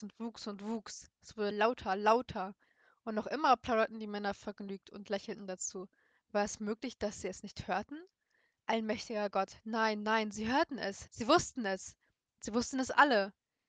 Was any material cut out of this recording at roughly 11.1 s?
yes; 2 cuts; at 1.5 s, 11.1 s

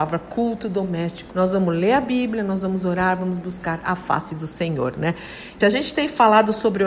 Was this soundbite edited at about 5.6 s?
yes; 2 cuts; at 1.3 s, 5.6 s

